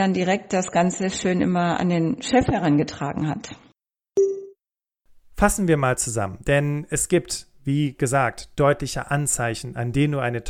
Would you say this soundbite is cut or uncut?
uncut